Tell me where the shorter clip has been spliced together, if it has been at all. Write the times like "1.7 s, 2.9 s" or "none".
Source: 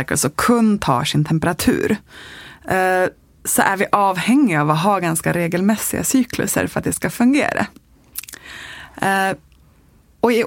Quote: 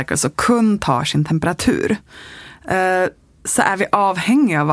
none

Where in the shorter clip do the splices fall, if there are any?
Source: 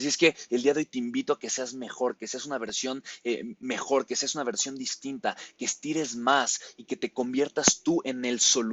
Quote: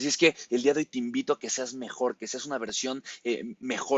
none

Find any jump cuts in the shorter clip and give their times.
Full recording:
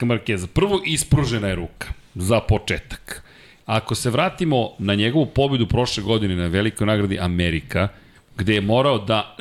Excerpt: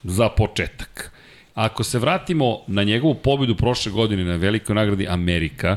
none

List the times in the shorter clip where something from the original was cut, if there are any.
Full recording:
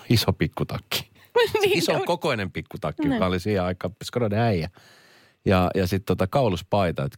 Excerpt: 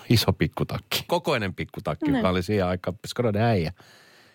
1.1 s

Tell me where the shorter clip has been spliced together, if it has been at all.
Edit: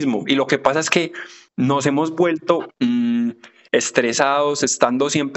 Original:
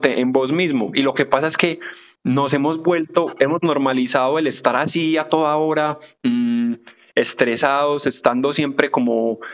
2.7 s

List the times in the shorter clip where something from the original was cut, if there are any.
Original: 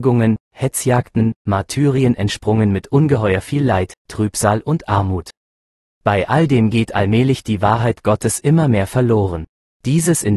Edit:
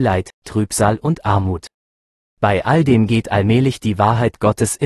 none

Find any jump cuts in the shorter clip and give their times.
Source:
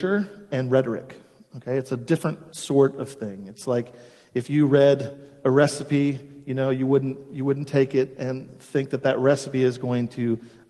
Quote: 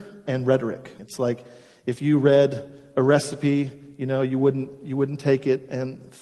1.0 s

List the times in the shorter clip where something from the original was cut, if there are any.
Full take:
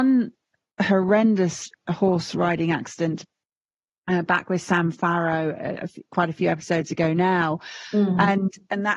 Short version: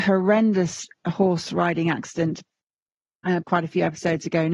3.4 s

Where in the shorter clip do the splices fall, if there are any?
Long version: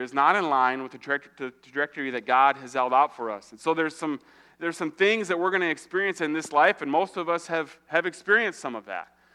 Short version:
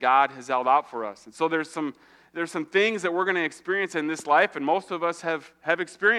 none

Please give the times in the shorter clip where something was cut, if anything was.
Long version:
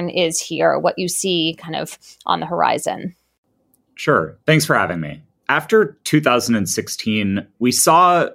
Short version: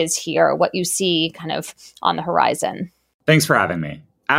3.2 s

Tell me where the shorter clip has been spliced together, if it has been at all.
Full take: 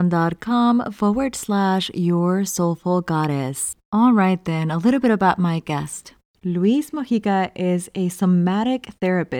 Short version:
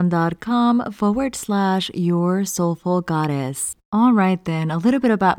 none

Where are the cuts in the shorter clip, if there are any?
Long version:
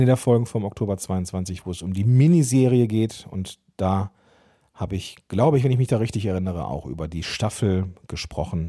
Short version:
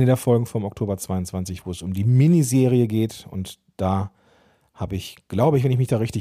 none

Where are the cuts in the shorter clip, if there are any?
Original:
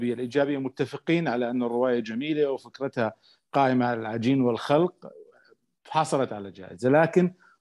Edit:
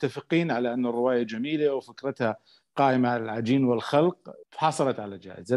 4.4 s

